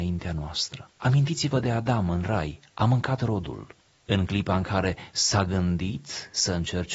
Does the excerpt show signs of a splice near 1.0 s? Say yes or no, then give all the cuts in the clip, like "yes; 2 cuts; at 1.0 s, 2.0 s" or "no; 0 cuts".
yes; 1 cut; at 1.0 s